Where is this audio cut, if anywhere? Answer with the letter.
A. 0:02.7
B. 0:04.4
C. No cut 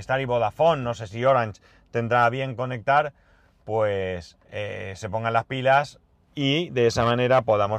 B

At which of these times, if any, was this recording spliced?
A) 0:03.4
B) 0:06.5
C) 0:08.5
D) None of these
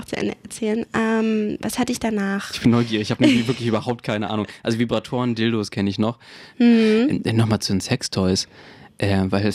B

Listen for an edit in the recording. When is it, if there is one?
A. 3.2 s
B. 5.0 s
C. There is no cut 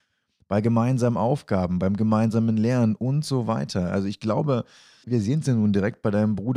B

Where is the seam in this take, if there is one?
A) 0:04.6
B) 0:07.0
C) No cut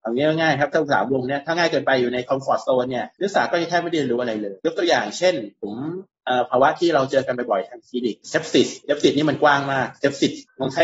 A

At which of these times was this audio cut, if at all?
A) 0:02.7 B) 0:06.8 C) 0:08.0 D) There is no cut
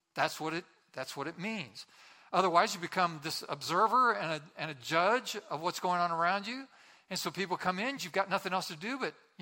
C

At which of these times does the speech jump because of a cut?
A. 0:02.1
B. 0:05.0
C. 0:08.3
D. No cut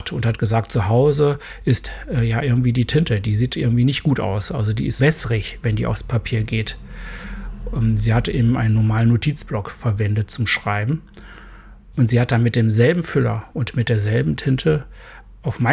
B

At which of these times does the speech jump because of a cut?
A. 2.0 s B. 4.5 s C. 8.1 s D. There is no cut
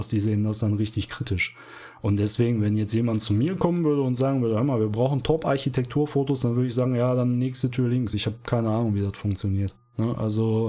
D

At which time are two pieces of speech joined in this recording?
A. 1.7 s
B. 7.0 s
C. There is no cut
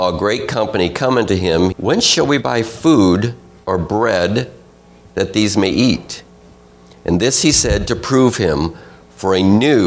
A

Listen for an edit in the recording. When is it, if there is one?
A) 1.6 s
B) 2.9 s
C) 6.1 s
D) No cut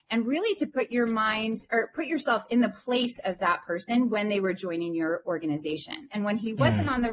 C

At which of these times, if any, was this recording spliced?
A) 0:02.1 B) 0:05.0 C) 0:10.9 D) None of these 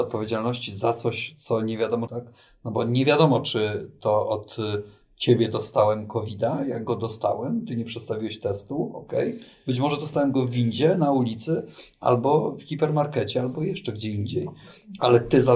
A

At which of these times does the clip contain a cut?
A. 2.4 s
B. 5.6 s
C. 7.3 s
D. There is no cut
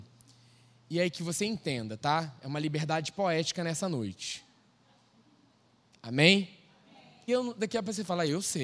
C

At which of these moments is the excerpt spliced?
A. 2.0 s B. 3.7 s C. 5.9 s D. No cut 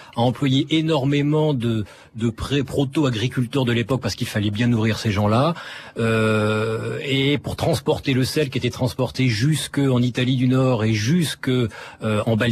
D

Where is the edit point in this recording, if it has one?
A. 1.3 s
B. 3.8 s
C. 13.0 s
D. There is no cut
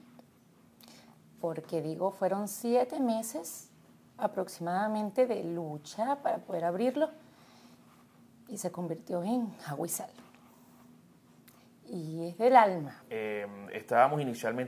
C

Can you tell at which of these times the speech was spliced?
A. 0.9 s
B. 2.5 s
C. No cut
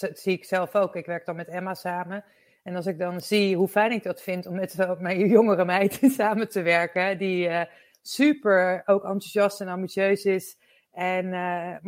C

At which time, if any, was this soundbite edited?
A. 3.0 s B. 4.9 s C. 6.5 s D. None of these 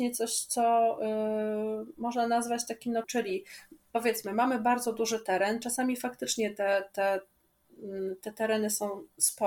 A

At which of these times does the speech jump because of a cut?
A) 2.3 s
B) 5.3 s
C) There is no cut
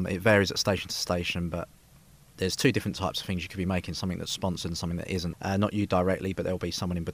B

